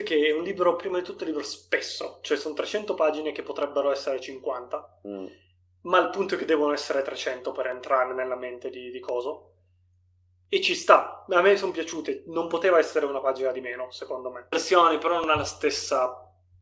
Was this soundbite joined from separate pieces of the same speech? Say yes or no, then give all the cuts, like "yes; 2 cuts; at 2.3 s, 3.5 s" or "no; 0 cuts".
yes; 1 cut; at 14.5 s